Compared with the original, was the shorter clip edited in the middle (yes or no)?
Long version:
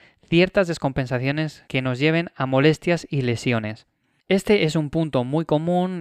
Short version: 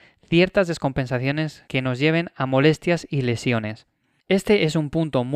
no